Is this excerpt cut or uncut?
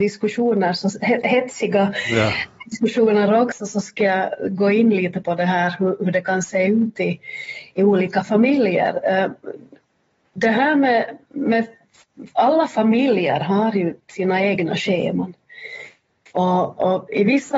uncut